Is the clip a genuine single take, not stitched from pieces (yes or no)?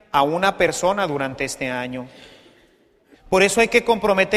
no